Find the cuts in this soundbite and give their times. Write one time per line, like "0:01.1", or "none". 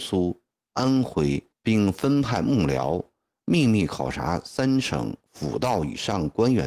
0:01.5